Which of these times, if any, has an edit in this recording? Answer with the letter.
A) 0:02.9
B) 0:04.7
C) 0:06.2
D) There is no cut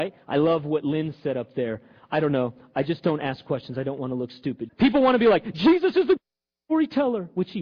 B